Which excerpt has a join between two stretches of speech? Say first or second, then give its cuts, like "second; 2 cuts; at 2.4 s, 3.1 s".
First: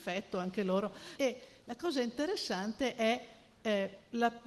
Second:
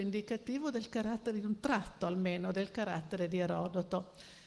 first; 1 cut; at 1.2 s